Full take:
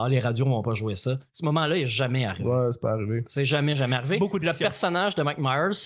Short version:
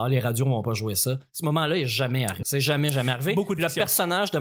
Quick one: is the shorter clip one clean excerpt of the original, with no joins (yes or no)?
no